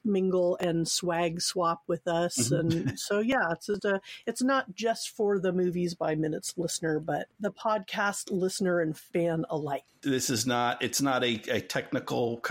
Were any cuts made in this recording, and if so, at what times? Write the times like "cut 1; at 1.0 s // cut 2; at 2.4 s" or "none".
cut 1; at 3.8 s